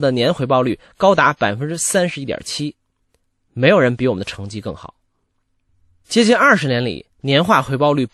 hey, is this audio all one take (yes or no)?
yes